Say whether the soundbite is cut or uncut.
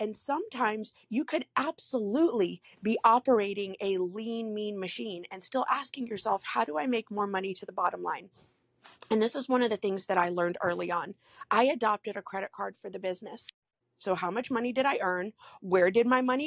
cut